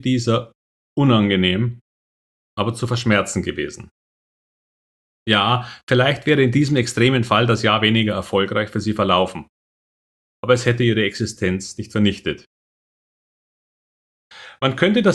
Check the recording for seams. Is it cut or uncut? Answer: uncut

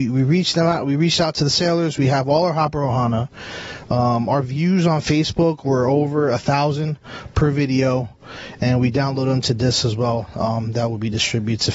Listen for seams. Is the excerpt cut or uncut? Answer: uncut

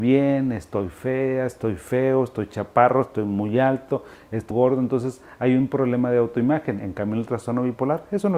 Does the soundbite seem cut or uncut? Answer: cut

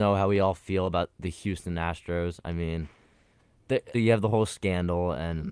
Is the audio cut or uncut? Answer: cut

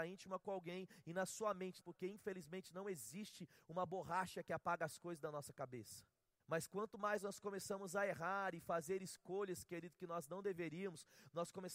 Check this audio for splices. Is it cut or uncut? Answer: cut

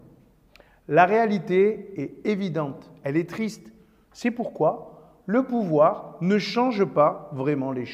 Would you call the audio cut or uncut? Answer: cut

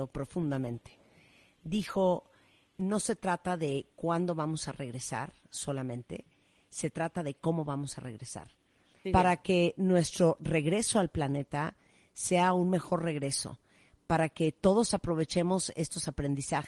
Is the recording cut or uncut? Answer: cut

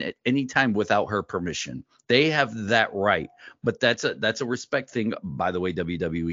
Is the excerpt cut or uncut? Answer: uncut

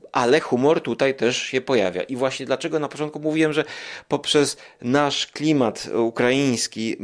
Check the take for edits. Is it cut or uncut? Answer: uncut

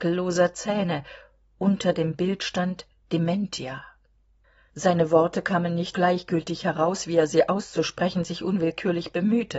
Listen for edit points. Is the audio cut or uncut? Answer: cut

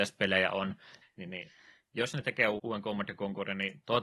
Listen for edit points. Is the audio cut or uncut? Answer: cut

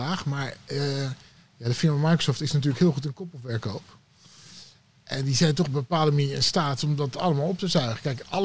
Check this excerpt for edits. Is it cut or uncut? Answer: uncut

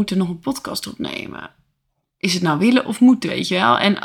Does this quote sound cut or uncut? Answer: uncut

